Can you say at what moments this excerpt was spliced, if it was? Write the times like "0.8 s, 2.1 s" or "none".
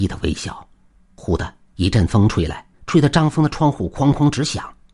2.7 s